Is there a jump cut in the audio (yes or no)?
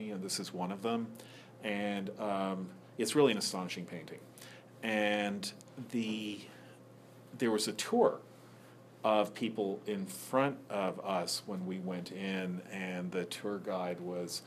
no